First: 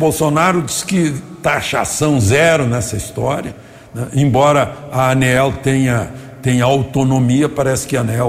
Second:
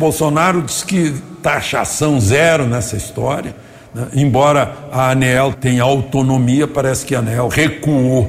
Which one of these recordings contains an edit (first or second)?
second